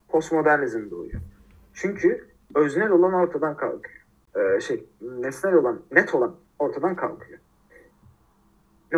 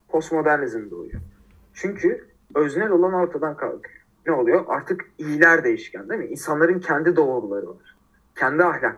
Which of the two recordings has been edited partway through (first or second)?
second